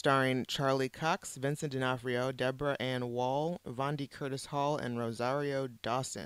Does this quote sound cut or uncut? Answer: cut